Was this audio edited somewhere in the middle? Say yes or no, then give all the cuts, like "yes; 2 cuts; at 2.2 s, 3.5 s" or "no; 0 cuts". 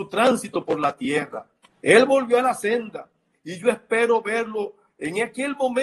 yes; 2 cuts; at 1.6 s, 3.3 s